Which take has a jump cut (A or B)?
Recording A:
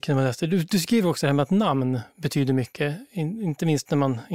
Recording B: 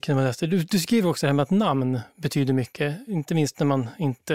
B